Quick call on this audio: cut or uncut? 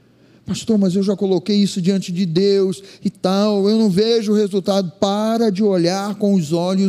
uncut